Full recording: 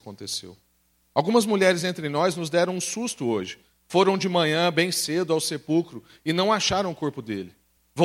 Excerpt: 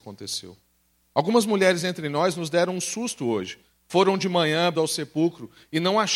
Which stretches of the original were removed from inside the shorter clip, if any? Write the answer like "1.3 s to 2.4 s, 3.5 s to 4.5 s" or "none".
4.7 s to 5.3 s